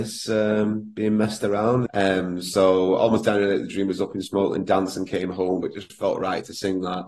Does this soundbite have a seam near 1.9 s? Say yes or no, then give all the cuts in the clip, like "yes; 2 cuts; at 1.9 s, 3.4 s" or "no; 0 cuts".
yes; 2 cuts; at 1.9 s, 5.6 s